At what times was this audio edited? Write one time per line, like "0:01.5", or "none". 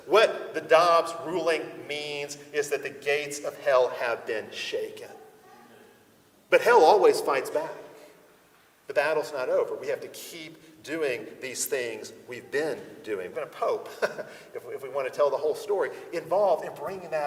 0:13.3